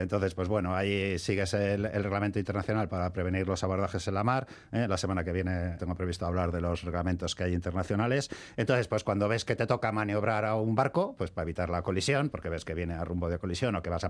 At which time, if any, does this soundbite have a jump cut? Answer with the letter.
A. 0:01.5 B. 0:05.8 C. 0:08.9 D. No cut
B